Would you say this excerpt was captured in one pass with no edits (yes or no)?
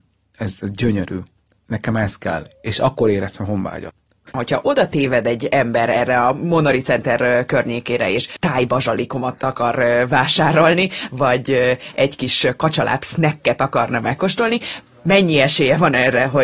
yes